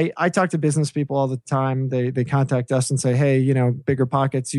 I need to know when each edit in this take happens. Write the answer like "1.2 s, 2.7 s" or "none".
none